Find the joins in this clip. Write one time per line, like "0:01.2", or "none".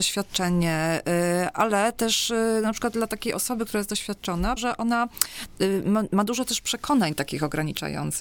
0:04.6